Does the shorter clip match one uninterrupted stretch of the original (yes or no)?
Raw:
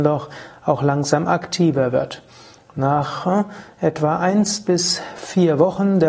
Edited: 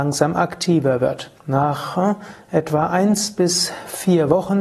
no